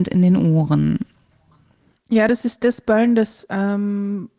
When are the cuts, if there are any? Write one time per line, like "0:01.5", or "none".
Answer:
none